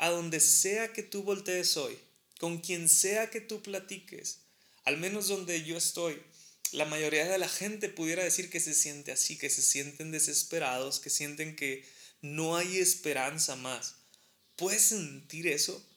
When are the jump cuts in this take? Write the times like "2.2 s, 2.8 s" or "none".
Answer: 9.4 s, 14.4 s